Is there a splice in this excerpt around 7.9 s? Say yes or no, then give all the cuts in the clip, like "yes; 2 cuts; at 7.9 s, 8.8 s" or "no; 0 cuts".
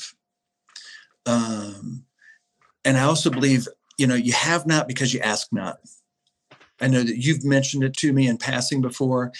yes; 2 cuts; at 6.8 s, 7.9 s